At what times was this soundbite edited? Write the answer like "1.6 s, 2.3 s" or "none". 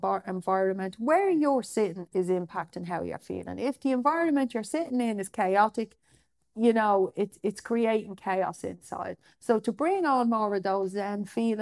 none